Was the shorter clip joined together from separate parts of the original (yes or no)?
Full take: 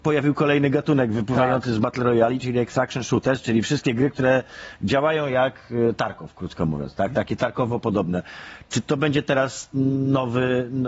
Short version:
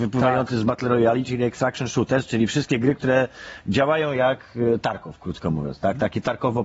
no